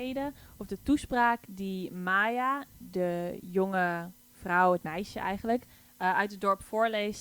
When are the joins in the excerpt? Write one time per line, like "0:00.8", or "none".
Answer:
none